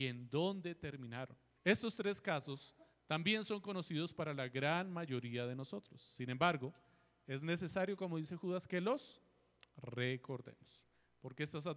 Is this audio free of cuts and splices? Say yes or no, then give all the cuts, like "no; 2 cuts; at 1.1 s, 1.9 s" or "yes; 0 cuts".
no; 1 cut; at 1.6 s